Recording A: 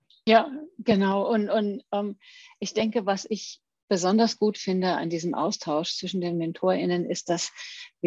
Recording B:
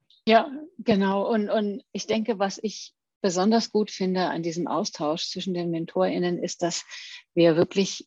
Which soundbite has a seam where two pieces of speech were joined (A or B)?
B